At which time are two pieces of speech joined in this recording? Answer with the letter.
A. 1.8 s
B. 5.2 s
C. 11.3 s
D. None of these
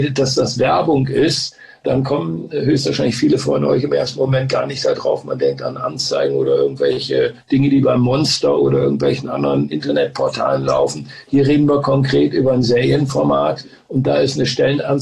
A